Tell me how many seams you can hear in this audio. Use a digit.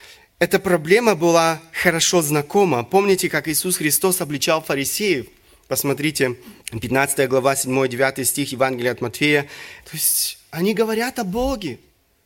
2